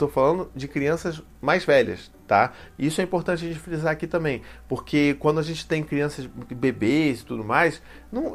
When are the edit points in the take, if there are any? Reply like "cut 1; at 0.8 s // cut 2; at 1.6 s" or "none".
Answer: none